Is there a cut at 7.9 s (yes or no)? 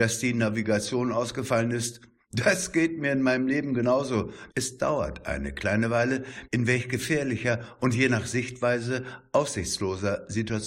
no